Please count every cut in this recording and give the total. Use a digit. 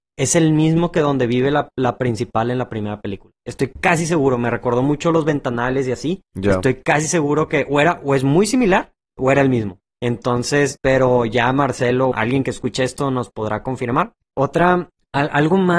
2